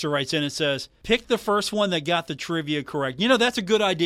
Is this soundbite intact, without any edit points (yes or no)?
no